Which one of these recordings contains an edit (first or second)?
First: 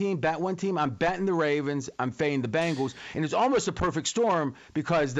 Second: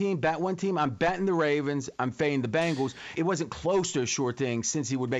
second